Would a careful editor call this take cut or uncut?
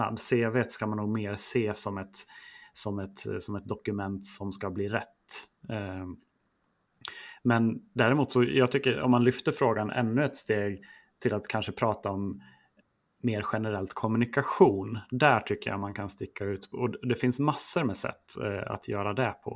uncut